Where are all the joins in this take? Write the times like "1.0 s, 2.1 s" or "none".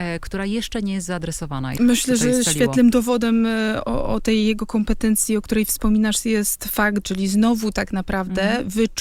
1.8 s, 7.0 s